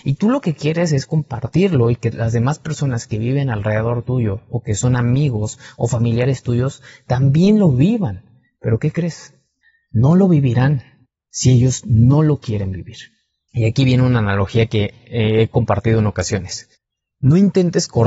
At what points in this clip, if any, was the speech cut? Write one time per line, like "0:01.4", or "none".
none